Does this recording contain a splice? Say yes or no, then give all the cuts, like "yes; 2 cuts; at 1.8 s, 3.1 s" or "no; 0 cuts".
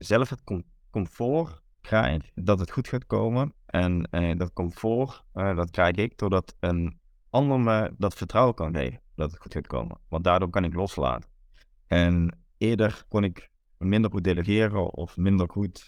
no; 0 cuts